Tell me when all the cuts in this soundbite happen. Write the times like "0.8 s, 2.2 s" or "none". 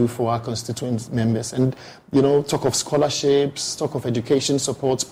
none